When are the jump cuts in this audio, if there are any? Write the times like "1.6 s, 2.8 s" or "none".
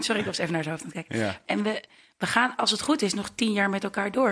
1.5 s